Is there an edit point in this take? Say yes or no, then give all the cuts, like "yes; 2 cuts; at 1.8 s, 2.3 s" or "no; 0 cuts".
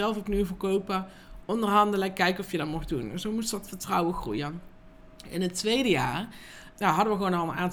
yes; 2 cuts; at 1.4 s, 6.7 s